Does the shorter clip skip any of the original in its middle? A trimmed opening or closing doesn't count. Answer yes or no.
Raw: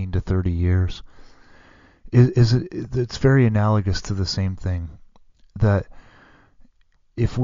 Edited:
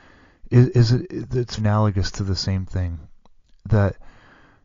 yes